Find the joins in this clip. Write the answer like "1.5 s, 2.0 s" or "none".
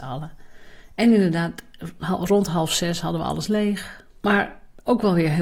4.2 s